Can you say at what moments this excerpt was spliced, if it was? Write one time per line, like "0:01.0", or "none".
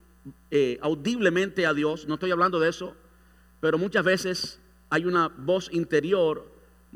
none